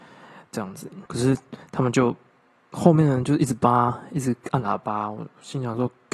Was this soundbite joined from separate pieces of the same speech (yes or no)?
yes